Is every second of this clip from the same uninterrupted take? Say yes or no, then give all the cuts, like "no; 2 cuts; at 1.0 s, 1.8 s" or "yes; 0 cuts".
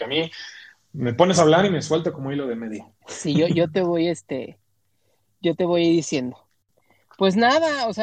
yes; 0 cuts